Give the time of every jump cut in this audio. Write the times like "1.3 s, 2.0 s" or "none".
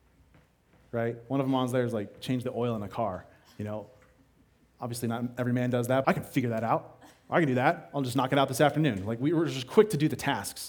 6.0 s